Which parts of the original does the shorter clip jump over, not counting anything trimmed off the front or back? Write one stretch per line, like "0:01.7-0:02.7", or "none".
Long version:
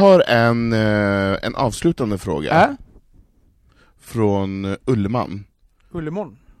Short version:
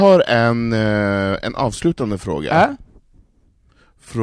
none